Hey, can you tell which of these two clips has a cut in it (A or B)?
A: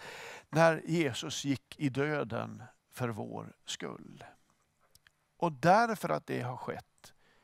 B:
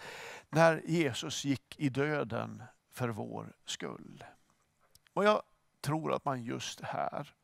B